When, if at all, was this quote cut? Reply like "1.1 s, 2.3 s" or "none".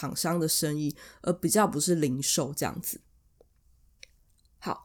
none